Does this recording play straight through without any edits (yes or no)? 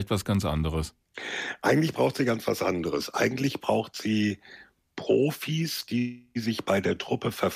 yes